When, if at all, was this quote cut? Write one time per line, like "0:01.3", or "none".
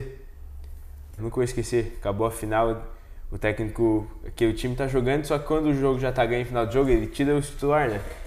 0:01.2